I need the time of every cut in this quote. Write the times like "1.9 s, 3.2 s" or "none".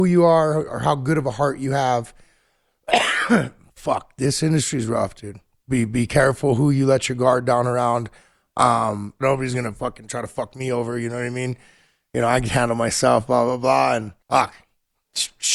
9.2 s, 14.2 s